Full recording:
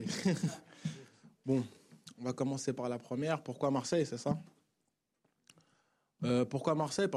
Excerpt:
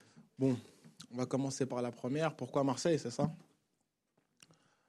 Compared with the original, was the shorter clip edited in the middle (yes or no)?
no